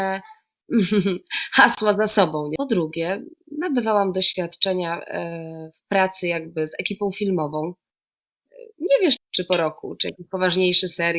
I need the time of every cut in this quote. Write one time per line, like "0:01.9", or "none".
0:02.6
0:09.2